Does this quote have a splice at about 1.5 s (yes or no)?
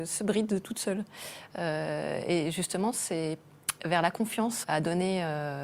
no